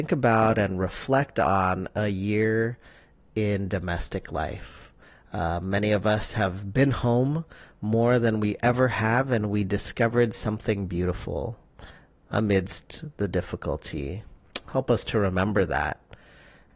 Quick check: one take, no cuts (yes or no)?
yes